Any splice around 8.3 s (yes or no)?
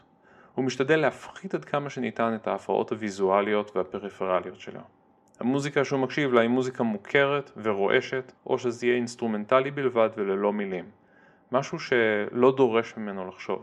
yes